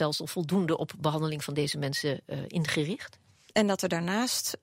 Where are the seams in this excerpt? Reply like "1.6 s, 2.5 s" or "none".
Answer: 3.5 s